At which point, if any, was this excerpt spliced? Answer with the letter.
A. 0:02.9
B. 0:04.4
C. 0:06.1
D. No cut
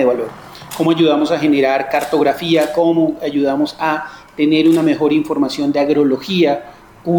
D